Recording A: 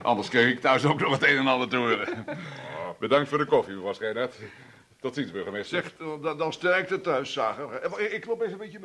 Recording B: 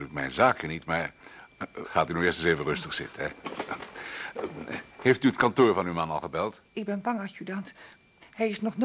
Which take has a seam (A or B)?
B